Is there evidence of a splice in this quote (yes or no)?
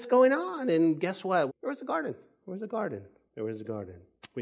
yes